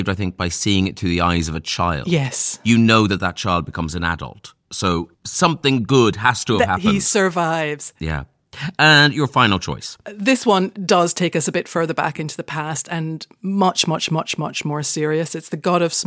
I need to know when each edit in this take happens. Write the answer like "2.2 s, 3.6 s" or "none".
none

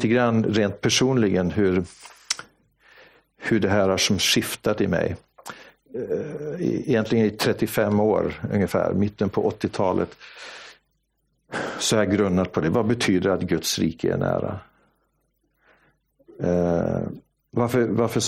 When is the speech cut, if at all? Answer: none

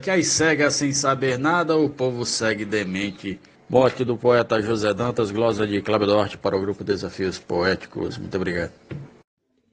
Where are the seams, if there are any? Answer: 3.6 s

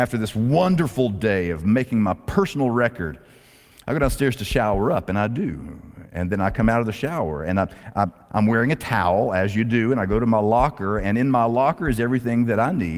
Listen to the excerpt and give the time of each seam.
none

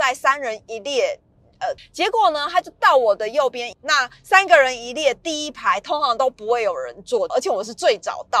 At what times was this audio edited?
1.8 s, 3.7 s, 7.3 s

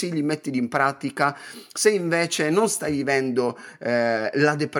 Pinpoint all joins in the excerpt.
none

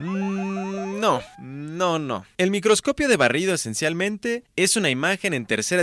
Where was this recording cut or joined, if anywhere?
2.3 s

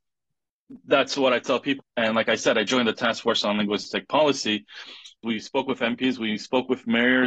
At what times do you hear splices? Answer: 1.8 s, 5.2 s

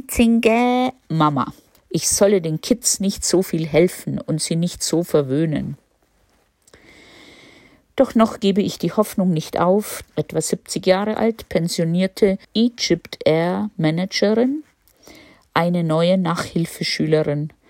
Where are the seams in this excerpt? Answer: 1.8 s, 10.0 s, 12.4 s

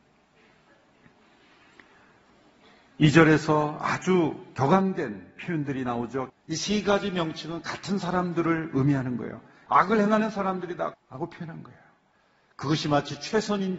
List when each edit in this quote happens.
6.3 s, 9.7 s, 10.9 s

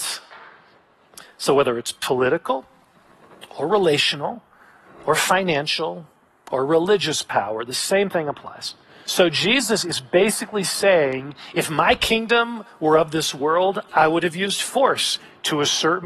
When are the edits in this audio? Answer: 9.1 s, 13.9 s

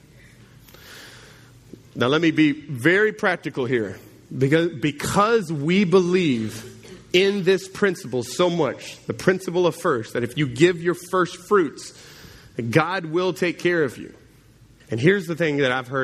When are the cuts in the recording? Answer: 14.8 s

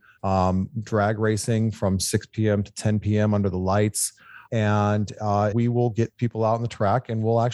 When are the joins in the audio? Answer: 4.5 s, 5.5 s

